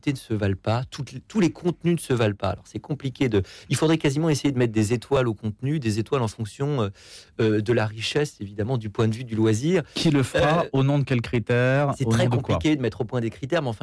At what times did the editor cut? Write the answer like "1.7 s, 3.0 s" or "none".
none